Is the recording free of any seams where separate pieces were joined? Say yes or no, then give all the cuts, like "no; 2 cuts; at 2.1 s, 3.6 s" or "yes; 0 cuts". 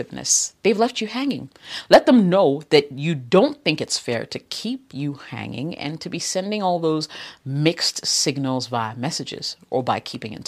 yes; 0 cuts